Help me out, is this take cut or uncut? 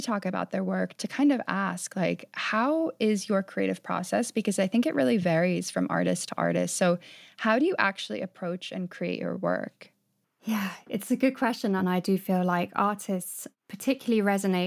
cut